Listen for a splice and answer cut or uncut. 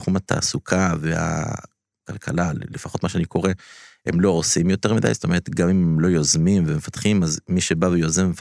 uncut